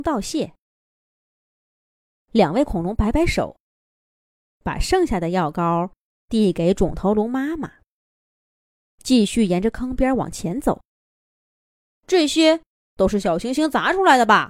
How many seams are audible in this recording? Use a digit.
0